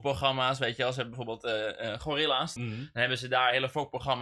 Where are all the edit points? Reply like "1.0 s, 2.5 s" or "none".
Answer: 2.6 s